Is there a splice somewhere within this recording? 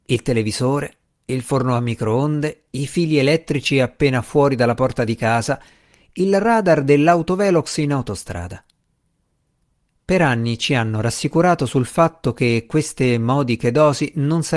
no; 0 cuts

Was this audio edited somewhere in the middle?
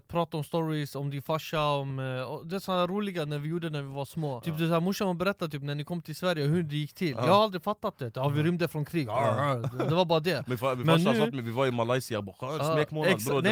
no; 0 cuts

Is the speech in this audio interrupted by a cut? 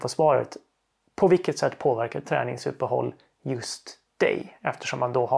no; 0 cuts

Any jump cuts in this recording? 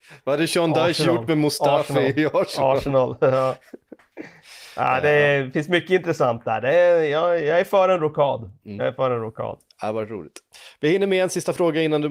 no; 0 cuts

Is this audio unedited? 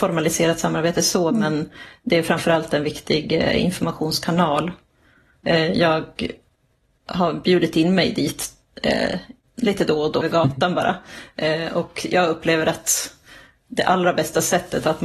no; 1 cut; at 10.2 s

